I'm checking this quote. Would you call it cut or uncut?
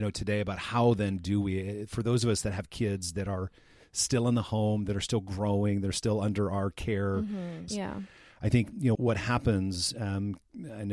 cut